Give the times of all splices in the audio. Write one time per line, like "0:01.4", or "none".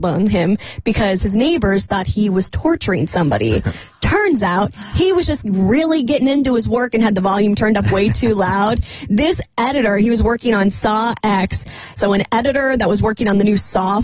0:12.0